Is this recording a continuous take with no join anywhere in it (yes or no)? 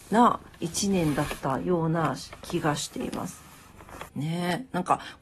no